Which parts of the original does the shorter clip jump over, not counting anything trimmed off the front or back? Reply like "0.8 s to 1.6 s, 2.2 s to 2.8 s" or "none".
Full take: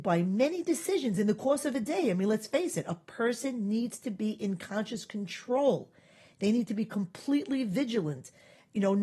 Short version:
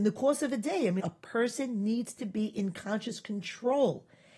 2.2 s to 2.8 s